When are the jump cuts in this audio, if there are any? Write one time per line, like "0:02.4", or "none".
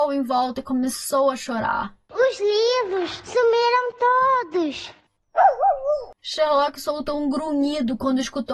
0:03.2